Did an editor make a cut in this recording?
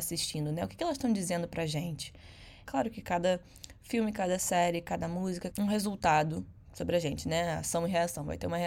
yes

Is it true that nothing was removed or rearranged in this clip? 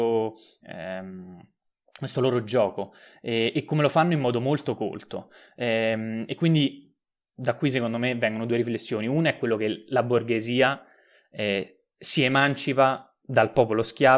yes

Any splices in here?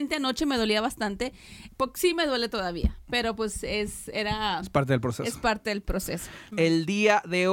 yes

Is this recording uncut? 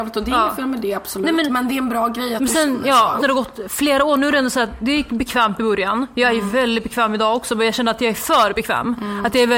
no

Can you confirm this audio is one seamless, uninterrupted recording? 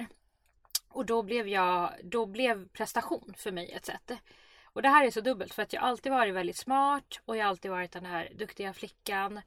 yes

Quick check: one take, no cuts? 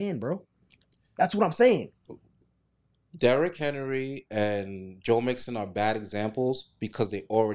yes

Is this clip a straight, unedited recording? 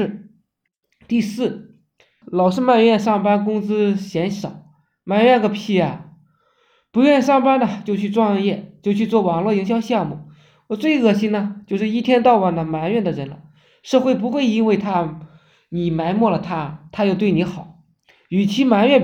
no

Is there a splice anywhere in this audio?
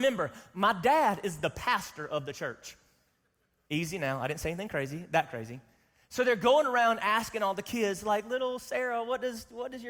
no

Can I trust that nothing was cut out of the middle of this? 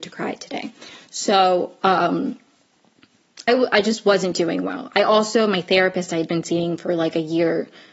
no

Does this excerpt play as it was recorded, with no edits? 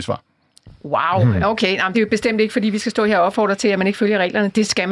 yes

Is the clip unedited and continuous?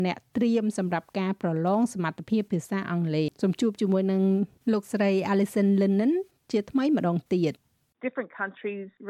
no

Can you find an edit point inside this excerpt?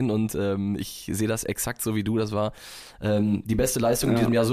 no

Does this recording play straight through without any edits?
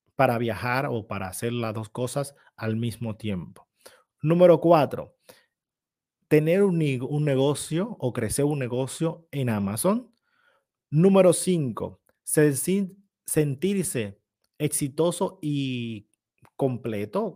yes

